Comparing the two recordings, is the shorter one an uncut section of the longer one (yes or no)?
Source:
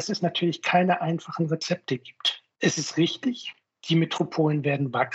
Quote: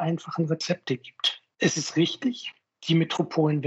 yes